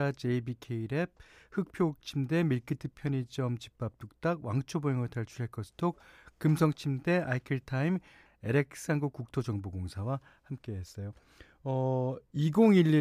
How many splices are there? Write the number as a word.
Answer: one